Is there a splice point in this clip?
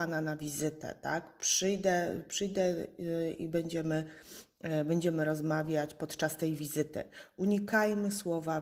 no; 0 cuts

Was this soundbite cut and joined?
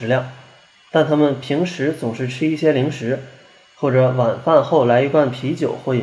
no; 0 cuts

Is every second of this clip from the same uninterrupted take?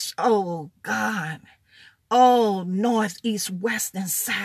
yes; 0 cuts

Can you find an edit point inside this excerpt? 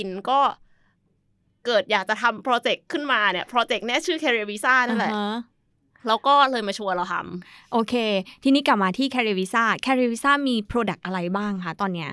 no; 0 cuts

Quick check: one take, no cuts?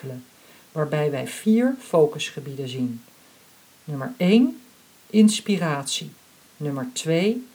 no; 1 cut; at 6.4 s

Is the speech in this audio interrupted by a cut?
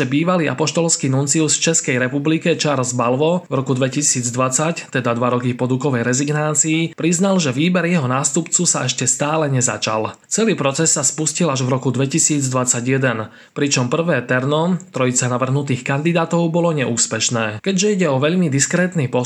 no; 0 cuts

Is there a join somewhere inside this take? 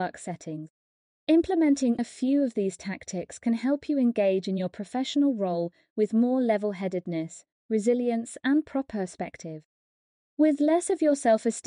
yes; 1 cut; at 2.0 s

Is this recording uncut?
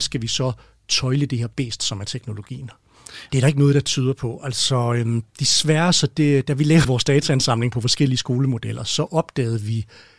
no; 1 cut; at 3.3 s

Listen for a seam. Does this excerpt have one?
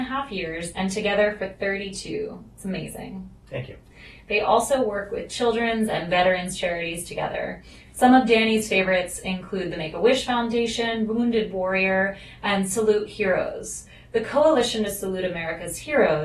no; 0 cuts

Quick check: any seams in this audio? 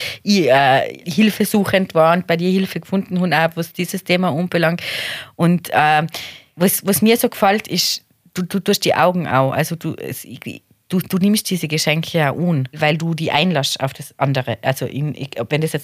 no; 0 cuts

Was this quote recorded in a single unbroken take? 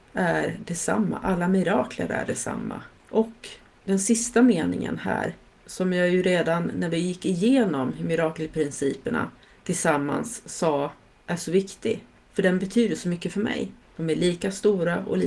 no; 2 cuts; at 3.0 s, 13.8 s

